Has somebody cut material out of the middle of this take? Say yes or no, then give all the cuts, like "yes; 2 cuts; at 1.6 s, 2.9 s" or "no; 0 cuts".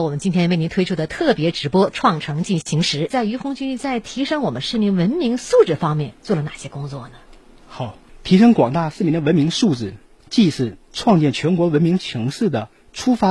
no; 0 cuts